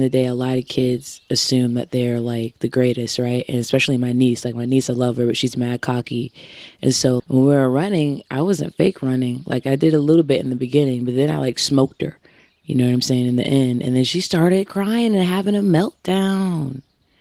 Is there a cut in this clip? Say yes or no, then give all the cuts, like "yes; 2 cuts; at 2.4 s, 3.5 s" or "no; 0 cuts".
yes; 1 cut; at 7.2 s